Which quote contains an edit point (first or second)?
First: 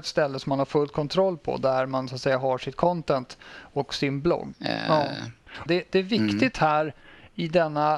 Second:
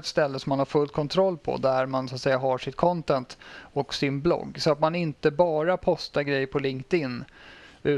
first